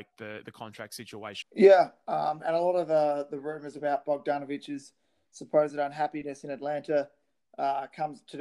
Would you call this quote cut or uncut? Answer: cut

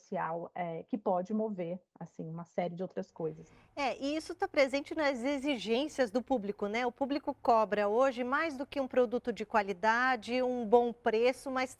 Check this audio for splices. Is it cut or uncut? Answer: uncut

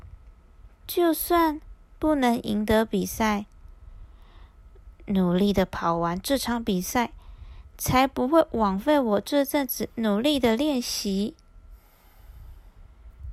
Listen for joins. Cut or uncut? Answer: uncut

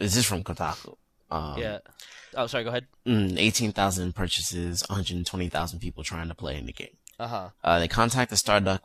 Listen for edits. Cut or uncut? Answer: cut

